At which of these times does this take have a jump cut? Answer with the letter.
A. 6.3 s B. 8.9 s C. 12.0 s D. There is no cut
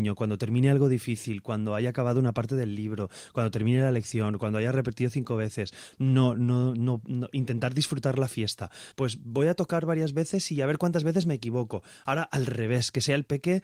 B